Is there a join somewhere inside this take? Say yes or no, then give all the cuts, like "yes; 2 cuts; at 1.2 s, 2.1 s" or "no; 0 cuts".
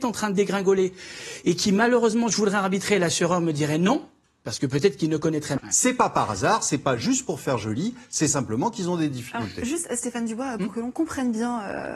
yes; 1 cut; at 5.6 s